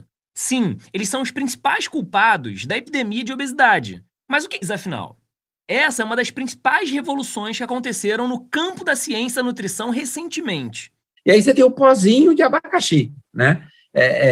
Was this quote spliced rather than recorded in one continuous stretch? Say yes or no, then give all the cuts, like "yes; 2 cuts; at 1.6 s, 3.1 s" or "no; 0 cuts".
yes; 2 cuts; at 4.6 s, 11.2 s